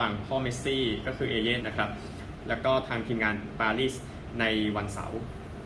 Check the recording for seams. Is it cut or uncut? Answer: cut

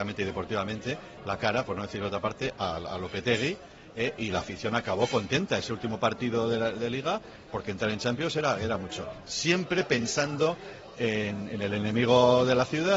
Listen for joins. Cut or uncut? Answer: cut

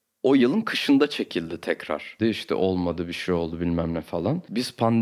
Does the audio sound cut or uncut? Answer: cut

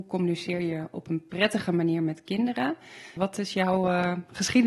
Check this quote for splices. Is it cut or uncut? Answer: cut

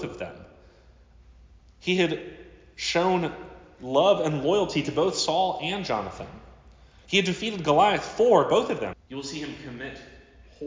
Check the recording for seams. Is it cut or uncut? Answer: cut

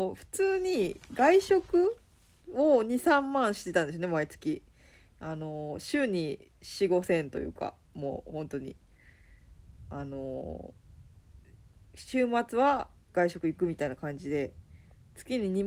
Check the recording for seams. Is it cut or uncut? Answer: uncut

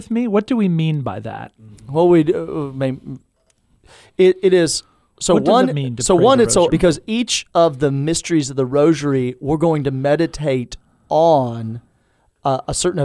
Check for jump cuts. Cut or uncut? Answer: cut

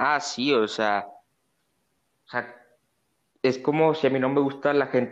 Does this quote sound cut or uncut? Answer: uncut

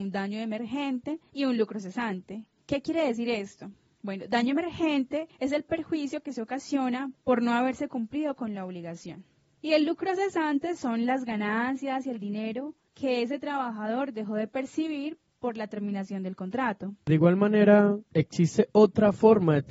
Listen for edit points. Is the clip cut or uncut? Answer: uncut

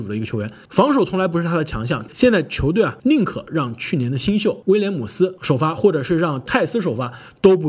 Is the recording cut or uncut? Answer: cut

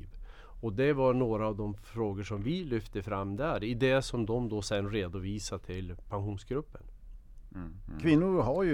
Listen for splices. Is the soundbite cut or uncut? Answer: uncut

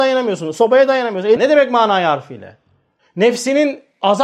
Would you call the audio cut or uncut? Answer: cut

